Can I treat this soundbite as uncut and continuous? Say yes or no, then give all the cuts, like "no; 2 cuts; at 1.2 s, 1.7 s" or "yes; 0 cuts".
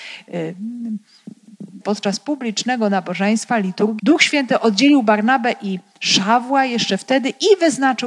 no; 2 cuts; at 1.8 s, 4.0 s